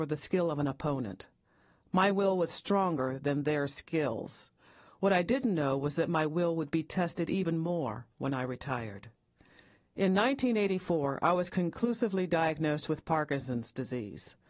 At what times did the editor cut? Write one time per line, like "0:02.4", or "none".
none